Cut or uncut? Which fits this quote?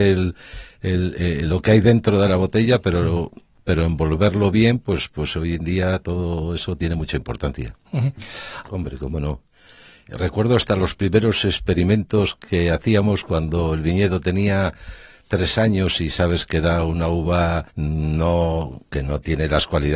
cut